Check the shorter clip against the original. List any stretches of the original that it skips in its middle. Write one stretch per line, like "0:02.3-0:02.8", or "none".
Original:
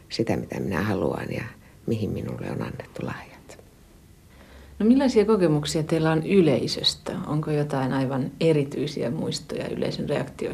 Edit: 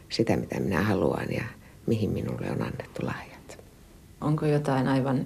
0:04.2-0:07.3